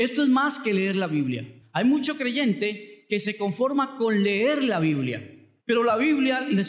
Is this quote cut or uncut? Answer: cut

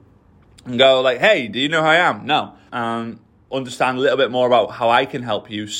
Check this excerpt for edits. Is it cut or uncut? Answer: cut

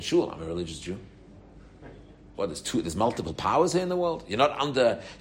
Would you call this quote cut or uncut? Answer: cut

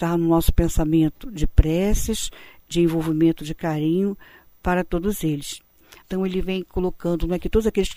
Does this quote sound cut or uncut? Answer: cut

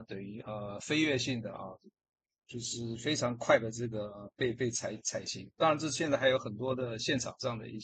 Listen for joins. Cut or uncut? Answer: uncut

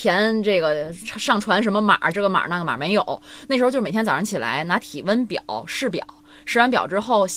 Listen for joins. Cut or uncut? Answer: cut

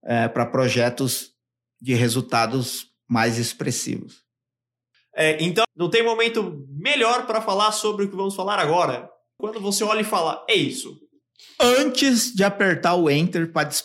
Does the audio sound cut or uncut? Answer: cut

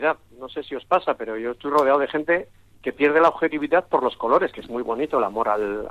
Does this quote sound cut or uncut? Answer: uncut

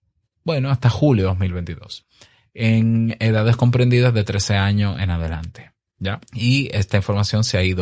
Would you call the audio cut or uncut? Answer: cut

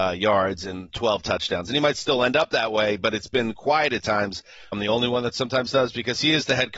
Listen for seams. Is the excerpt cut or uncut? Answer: cut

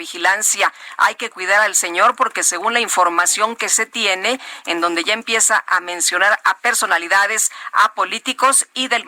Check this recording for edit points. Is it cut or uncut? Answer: cut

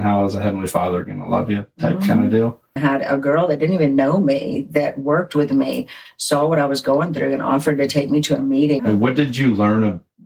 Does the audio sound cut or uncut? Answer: cut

